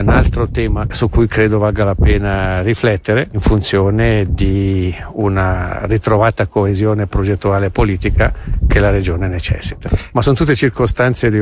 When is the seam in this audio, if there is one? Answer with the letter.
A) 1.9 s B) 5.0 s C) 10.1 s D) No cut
C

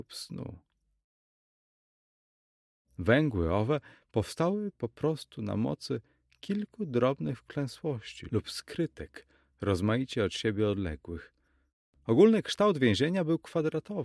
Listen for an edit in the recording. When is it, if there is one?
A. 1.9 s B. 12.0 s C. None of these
C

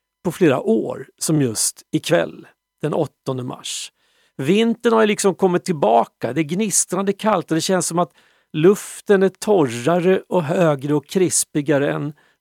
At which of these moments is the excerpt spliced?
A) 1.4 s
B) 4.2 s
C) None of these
C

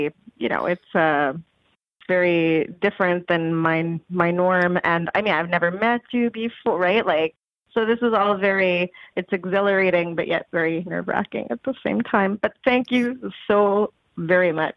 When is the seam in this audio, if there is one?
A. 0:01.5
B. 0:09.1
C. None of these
B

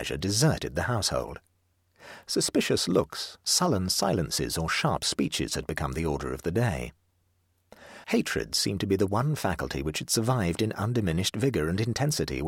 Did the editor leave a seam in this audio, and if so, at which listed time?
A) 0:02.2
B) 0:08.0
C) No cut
B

